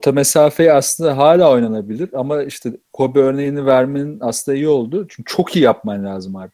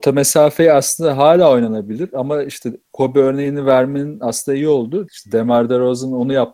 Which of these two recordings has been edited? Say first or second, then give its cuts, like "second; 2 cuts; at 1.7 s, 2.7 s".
second; 1 cut; at 5.1 s